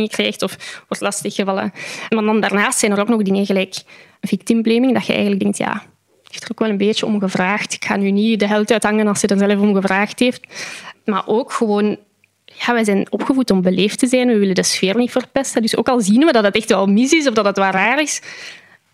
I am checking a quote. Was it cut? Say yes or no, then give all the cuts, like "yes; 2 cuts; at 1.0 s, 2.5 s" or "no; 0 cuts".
no; 0 cuts